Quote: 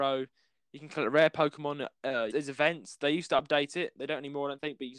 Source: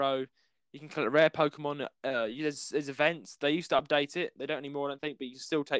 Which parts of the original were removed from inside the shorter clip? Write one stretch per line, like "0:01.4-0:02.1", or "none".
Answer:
0:02.3-0:02.7